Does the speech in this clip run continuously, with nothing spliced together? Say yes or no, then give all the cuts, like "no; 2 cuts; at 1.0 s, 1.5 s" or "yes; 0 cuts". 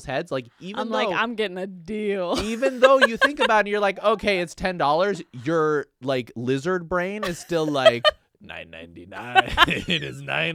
yes; 0 cuts